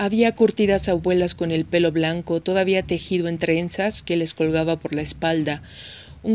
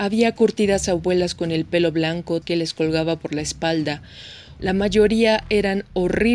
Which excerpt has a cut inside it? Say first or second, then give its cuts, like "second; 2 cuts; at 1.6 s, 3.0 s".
second; 2 cuts; at 2.4 s, 4.6 s